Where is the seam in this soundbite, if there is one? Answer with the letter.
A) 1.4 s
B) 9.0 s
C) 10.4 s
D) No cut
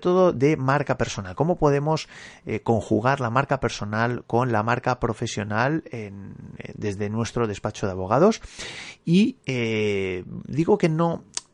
D